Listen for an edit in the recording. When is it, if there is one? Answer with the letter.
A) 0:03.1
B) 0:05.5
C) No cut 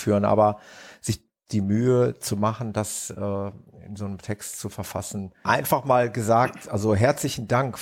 B